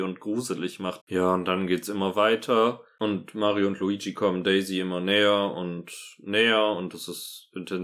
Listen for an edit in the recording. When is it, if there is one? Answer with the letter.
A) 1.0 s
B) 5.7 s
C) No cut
A